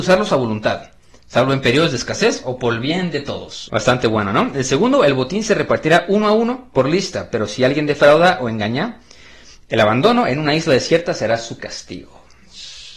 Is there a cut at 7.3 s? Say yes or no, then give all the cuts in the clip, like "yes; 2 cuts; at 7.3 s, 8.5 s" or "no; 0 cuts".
no; 1 cut; at 3.7 s